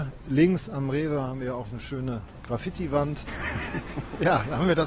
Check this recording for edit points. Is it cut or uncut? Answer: cut